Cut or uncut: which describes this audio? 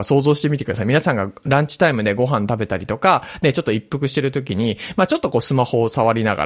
uncut